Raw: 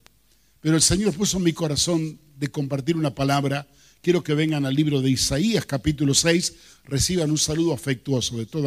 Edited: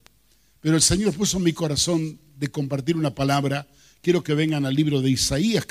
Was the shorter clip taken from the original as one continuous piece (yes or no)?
yes